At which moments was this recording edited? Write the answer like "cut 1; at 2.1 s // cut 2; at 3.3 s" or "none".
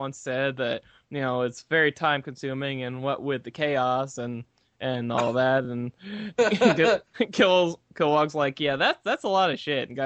none